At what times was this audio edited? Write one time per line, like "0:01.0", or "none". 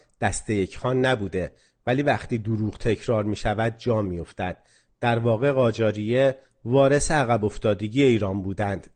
none